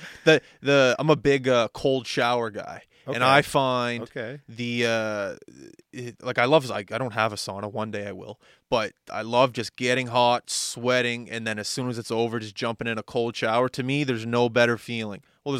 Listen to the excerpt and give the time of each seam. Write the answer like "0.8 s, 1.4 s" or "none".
none

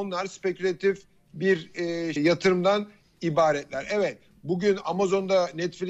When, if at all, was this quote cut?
2.2 s

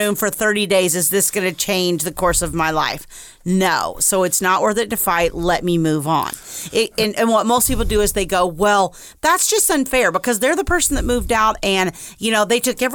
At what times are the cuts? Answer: none

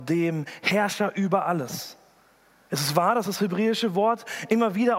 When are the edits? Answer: 2.7 s

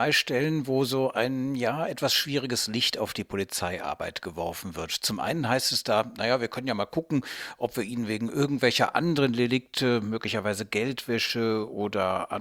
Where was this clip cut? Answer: none

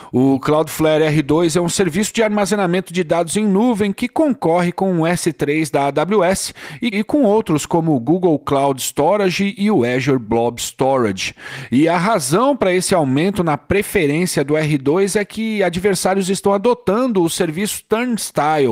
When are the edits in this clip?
6.9 s

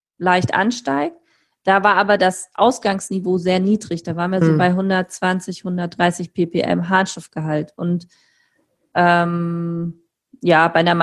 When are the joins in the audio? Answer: none

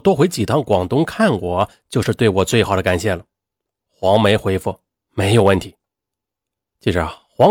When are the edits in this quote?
none

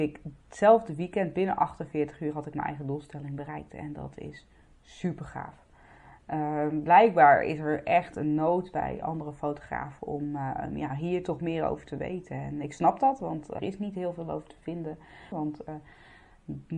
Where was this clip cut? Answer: 13.6 s, 15.3 s

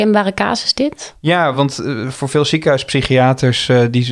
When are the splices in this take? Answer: none

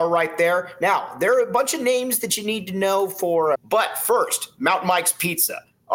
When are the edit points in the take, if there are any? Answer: 3.5 s

